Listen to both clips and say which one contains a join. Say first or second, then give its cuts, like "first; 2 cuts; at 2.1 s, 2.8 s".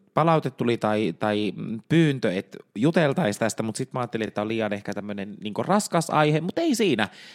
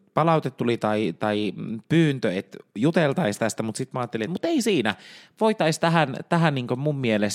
second; 1 cut; at 4.3 s